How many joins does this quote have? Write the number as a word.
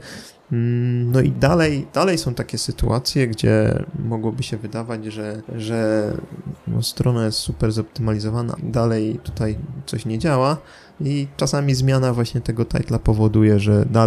two